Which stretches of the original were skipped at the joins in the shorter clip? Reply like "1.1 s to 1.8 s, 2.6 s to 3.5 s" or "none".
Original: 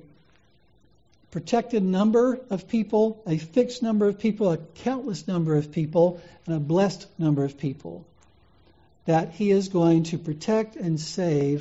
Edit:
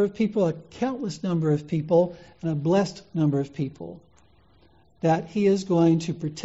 none